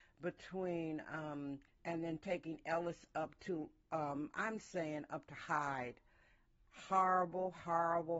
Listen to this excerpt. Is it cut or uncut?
cut